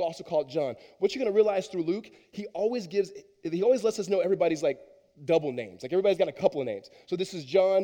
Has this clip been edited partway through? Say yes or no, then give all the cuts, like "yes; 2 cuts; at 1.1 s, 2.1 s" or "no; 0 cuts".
no; 0 cuts